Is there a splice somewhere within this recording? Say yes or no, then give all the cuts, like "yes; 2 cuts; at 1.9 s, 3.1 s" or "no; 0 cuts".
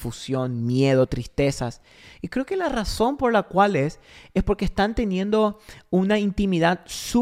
no; 0 cuts